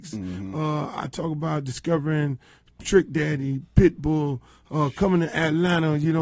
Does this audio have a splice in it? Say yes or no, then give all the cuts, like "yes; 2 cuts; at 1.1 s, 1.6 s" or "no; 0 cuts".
no; 0 cuts